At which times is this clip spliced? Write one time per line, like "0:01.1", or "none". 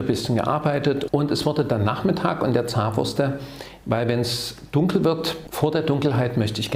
0:01.1
0:03.8

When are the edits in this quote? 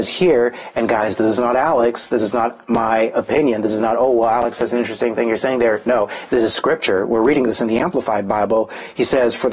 none

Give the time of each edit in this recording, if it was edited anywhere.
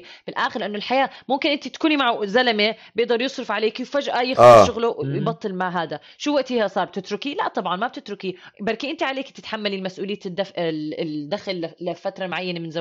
none

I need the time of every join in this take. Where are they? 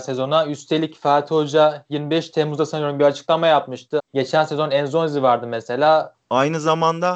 0:04.0
0:06.1

